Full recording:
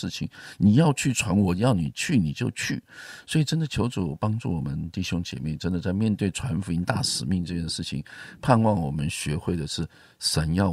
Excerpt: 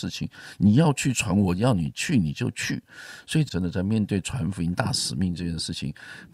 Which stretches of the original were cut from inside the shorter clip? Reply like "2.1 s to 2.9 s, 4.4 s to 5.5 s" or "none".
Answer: 3.5 s to 5.6 s